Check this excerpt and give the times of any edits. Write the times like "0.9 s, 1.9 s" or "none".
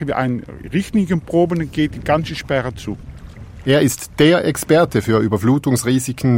3.6 s